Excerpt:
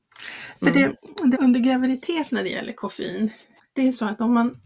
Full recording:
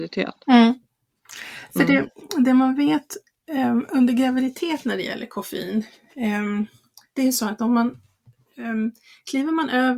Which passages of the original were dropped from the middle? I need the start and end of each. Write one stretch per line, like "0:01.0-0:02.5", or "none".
0:02.5-0:03.9
0:06.1-0:07.0